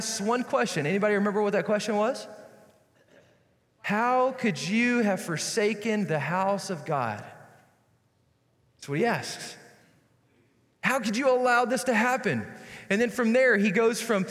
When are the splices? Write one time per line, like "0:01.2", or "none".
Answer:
none